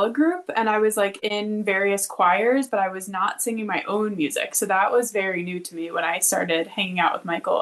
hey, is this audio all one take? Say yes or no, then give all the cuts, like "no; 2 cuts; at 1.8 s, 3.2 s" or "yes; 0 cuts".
yes; 0 cuts